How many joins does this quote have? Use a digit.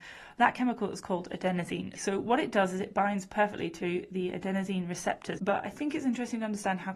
2